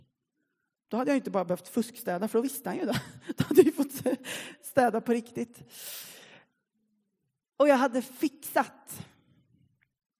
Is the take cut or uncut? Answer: uncut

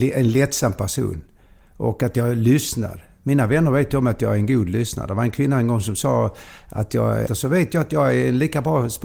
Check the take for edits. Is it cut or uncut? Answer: cut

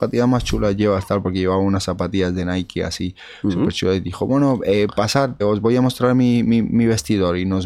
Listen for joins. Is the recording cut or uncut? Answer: cut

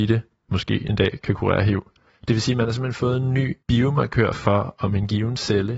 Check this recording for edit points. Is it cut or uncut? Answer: cut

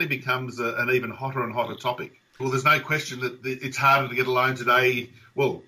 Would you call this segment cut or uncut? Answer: cut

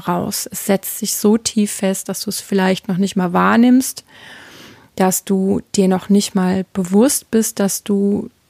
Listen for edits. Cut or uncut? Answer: uncut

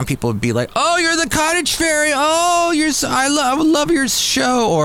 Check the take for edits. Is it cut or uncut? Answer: uncut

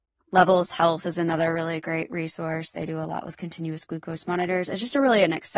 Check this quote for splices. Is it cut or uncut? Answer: uncut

